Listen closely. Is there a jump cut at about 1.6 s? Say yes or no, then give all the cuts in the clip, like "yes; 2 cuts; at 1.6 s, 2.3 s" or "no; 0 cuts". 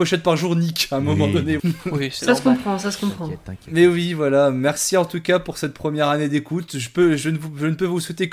yes; 1 cut; at 1.6 s